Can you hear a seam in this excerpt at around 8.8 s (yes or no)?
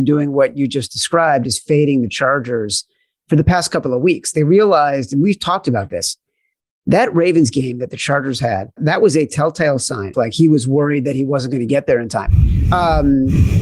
yes